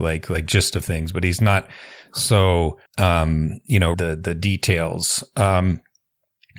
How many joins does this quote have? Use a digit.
2